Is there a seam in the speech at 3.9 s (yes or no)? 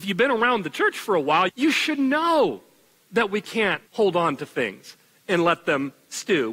yes